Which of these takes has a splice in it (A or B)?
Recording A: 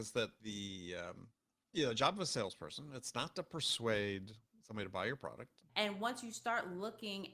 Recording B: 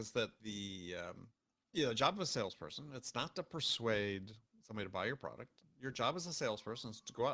A